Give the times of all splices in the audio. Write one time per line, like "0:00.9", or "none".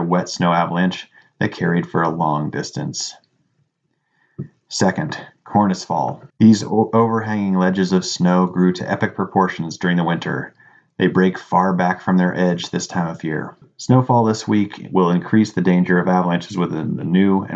0:06.3
0:13.6